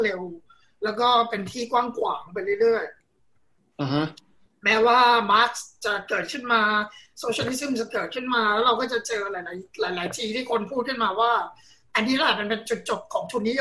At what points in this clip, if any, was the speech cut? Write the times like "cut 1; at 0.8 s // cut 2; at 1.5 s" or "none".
none

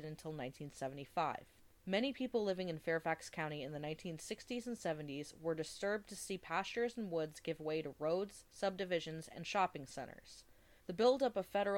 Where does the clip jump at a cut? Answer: cut 1; at 10.8 s

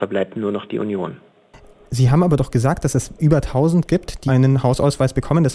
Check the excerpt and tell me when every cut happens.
cut 1; at 4.3 s

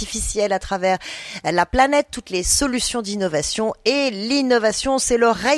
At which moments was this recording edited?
none

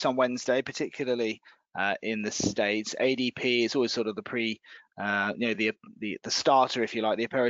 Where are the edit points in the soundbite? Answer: none

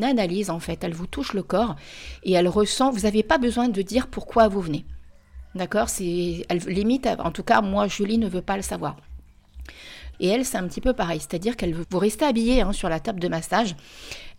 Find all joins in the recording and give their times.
cut 1; at 10.1 s // cut 2; at 11.8 s

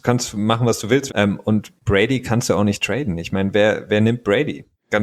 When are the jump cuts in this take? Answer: cut 1; at 1.1 s

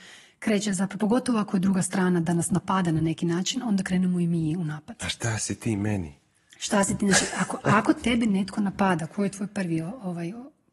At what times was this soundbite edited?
none

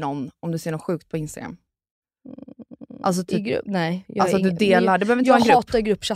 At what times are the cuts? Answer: none

